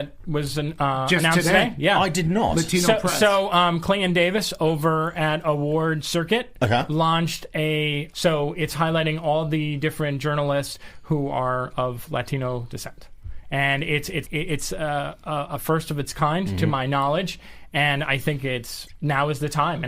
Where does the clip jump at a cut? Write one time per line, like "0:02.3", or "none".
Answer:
0:08.1
0:14.2